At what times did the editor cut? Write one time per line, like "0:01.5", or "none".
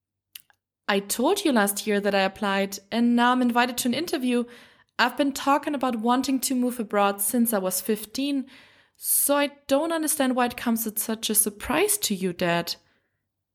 none